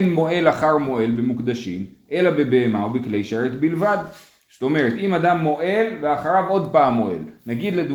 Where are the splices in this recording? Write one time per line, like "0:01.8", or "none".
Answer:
none